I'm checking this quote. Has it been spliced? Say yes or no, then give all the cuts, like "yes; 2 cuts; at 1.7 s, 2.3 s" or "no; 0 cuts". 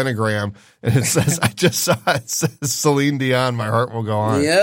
no; 0 cuts